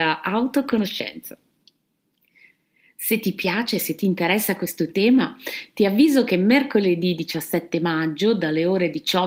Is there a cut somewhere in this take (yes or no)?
no